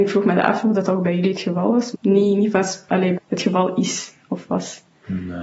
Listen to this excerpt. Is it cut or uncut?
cut